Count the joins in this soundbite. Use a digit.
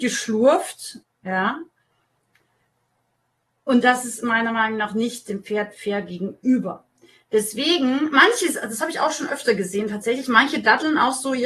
1